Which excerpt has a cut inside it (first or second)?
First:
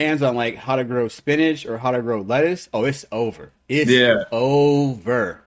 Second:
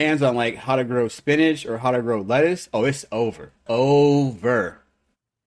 second